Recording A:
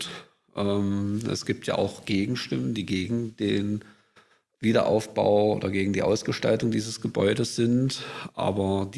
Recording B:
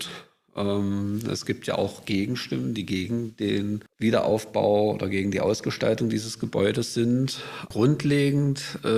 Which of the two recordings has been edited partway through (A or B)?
B